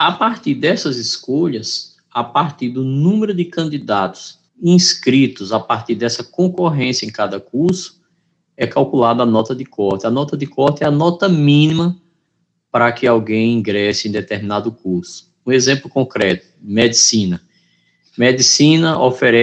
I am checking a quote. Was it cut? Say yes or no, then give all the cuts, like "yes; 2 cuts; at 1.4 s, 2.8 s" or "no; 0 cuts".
yes; 1 cut; at 4.5 s